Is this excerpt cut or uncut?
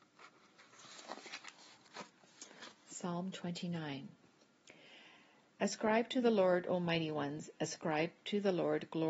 uncut